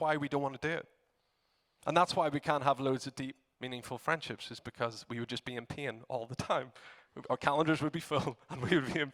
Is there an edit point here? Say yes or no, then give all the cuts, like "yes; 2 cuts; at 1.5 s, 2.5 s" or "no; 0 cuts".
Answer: no; 0 cuts